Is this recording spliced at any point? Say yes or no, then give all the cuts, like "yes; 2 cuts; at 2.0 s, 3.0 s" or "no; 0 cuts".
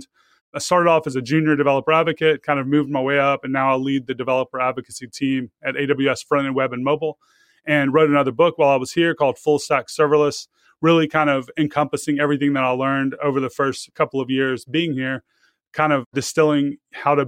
no; 0 cuts